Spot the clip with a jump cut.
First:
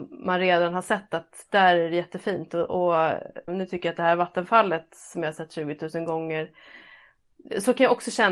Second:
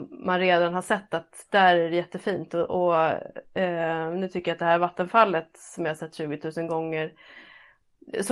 first; 1 cut; at 3.5 s

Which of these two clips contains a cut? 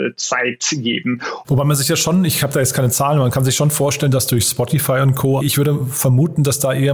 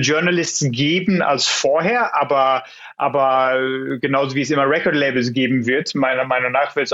first; 2 cuts; at 1.4 s, 5.4 s

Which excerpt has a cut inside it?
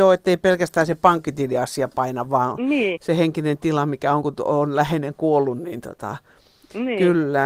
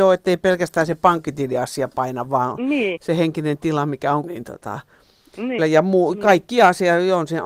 second; 2 cuts; at 4.2 s, 5.6 s

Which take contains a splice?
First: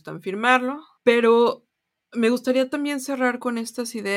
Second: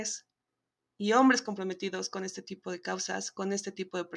first; 1 cut; at 1.0 s

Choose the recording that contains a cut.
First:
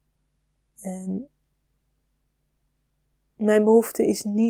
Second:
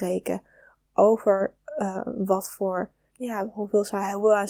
second; 1 cut; at 3.1 s

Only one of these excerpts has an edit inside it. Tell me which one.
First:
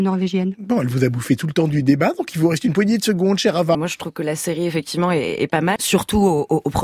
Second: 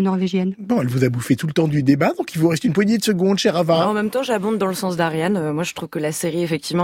first; 2 cuts; at 3.7 s, 5.8 s

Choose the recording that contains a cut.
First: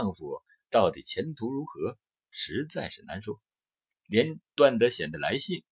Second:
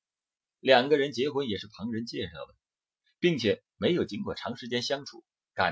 first; 1 cut; at 3.9 s

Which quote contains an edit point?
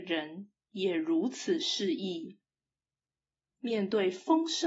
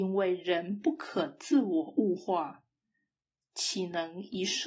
second; 1 cut; at 3.4 s

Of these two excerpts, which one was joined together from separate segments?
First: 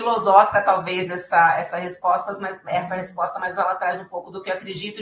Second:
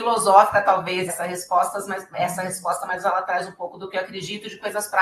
second; 1 cut; at 1.1 s

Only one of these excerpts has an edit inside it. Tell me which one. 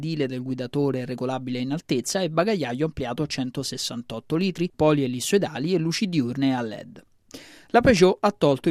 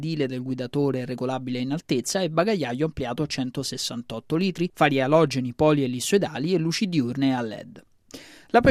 first; 1 cut; at 4.7 s

